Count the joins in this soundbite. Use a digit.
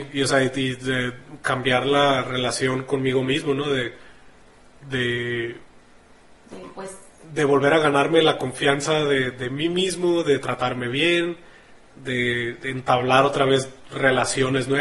0